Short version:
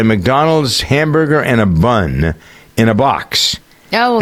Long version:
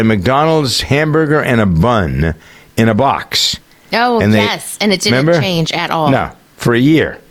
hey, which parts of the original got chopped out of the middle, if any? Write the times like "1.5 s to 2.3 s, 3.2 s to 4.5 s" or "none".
none